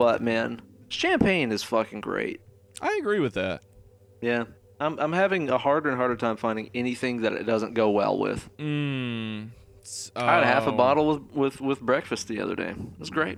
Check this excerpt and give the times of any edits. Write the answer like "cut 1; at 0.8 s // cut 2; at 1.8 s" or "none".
cut 1; at 8.5 s